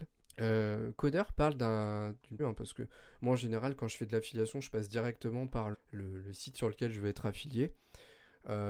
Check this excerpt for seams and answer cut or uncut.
cut